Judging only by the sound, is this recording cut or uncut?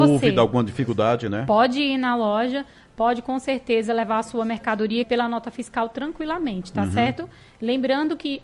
cut